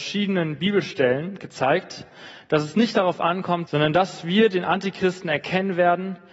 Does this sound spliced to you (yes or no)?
yes